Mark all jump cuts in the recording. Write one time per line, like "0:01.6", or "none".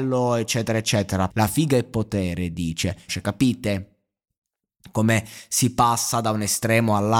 0:01.3
0:03.1